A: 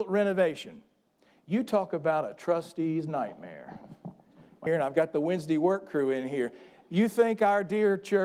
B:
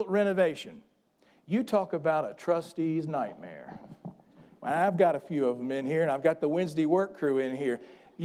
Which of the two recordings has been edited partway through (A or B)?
A